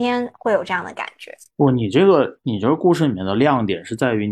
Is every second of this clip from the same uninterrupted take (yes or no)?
yes